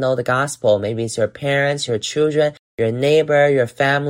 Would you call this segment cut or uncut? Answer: uncut